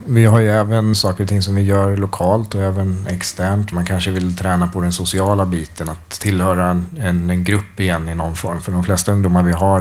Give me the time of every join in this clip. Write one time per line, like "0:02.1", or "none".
0:00.9
0:03.7